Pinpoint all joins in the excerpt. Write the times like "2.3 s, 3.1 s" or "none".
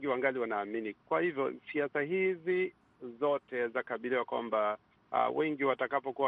none